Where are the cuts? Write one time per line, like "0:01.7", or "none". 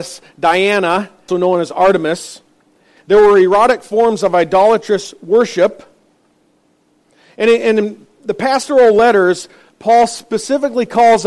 0:01.3
0:03.0